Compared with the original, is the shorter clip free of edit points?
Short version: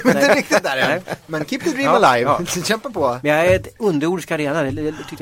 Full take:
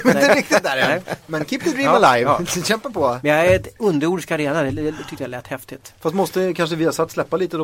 yes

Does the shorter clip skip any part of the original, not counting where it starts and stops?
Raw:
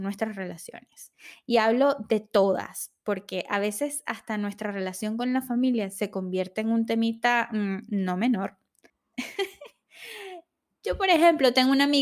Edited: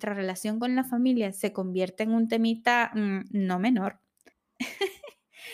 no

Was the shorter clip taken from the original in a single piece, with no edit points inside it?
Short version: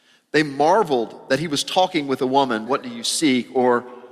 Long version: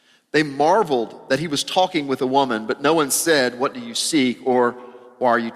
no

